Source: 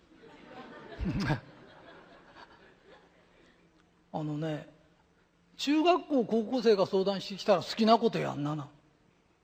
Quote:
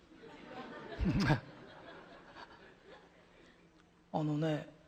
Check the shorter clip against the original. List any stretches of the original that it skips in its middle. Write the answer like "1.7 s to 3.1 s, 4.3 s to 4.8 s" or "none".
none